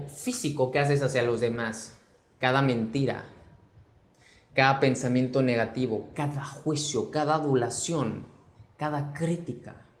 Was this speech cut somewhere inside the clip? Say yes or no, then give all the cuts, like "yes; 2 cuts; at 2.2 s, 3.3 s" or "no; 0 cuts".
no; 0 cuts